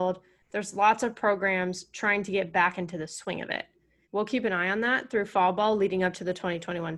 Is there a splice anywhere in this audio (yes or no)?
yes